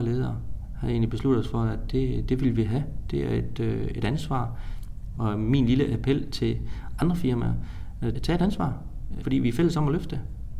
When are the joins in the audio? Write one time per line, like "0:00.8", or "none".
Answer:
0:08.2